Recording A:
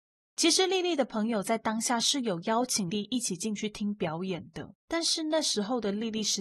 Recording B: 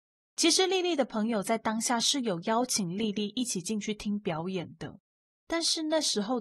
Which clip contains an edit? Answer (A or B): A